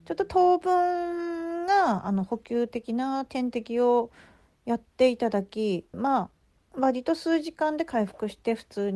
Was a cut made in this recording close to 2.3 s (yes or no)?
no